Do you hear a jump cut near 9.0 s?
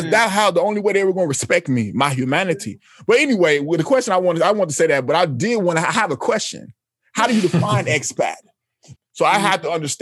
yes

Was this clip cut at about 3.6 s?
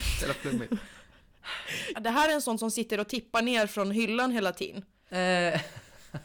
no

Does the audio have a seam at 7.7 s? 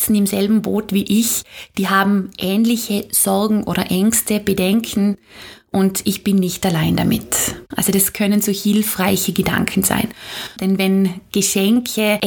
yes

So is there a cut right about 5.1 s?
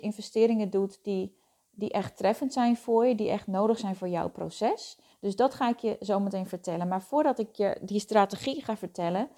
yes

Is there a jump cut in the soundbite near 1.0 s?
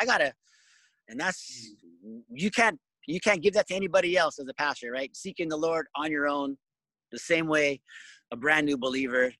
yes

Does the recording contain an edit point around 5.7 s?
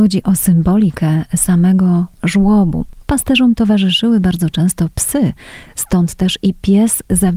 no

